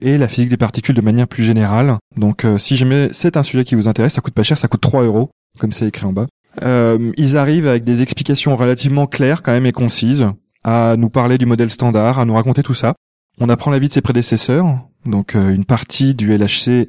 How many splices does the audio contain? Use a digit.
3